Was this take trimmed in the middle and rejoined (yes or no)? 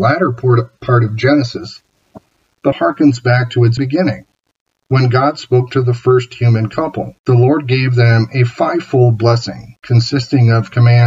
yes